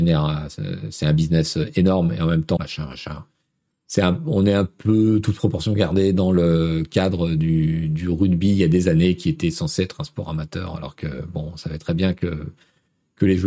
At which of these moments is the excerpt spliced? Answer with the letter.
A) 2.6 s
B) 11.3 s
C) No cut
A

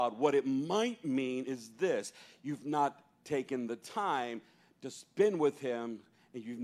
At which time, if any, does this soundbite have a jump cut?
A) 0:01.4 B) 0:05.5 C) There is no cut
C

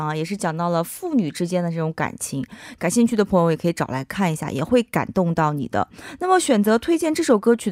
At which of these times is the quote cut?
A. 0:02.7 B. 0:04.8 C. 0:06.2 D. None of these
D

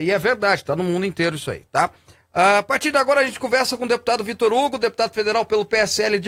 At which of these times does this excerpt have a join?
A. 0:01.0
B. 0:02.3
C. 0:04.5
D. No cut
D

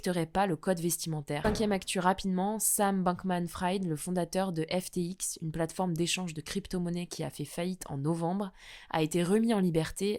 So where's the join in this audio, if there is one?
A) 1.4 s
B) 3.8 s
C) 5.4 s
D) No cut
A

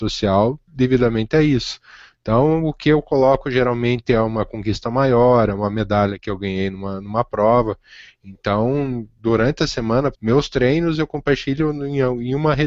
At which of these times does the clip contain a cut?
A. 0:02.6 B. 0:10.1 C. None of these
B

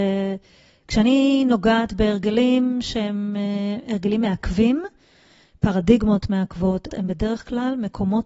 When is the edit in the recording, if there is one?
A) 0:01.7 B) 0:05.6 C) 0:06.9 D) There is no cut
C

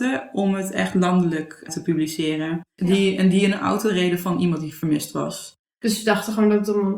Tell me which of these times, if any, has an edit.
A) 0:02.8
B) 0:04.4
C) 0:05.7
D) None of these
A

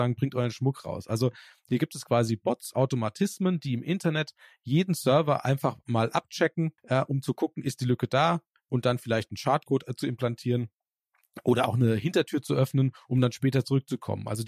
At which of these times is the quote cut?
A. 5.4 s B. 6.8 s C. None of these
B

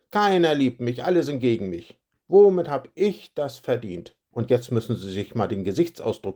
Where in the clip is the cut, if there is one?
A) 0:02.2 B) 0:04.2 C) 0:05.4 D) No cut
B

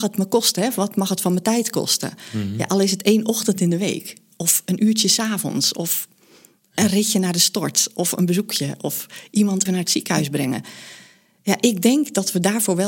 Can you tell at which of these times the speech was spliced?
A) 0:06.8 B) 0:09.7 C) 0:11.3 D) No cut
B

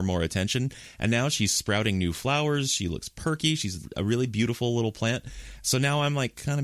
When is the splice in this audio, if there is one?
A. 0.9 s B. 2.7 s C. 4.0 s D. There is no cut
D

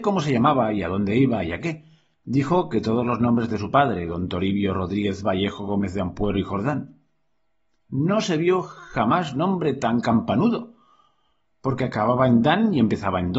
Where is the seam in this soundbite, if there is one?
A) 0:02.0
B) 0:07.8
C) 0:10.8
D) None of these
D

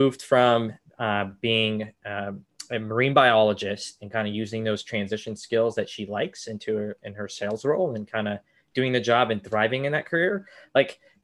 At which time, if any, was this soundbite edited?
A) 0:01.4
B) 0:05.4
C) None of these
C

